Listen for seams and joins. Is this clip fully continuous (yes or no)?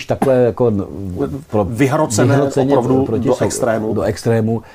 yes